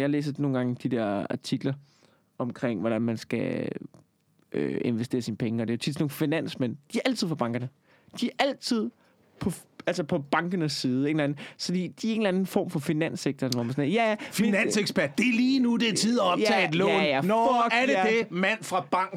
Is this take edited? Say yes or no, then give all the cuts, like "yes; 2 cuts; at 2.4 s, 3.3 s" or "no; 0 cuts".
no; 0 cuts